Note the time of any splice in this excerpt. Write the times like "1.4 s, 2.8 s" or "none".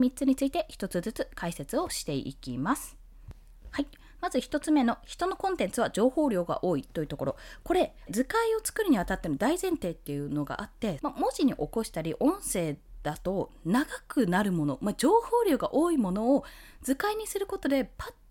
8.1 s, 11.0 s